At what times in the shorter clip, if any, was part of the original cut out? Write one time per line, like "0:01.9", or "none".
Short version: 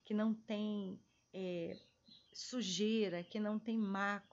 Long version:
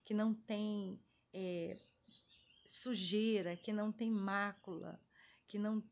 0:02.3